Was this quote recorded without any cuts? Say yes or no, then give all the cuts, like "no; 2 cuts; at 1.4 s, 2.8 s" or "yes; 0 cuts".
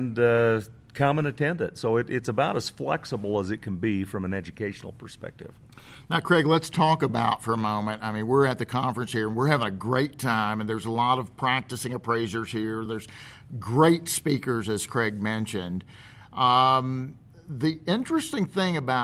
no; 1 cut; at 12.9 s